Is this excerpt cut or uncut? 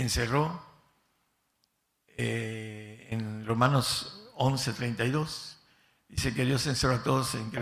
uncut